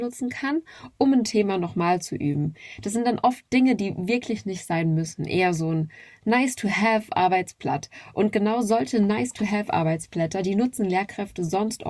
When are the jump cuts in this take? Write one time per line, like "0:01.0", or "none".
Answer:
none